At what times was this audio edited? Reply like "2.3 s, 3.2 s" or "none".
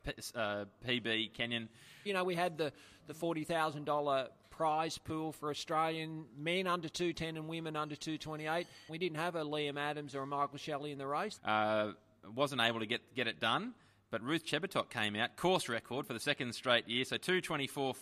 2.1 s, 8.9 s, 11.4 s